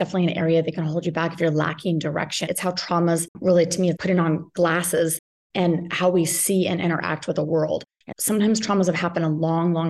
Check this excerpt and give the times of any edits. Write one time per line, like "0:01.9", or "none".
0:02.5
0:04.0
0:08.1